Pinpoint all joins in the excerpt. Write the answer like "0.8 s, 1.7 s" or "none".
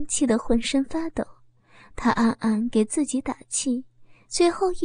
none